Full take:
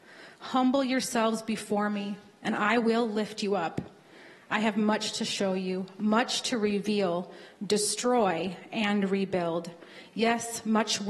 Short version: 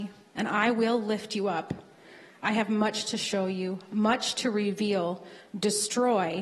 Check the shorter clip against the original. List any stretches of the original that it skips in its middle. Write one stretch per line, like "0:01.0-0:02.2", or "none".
none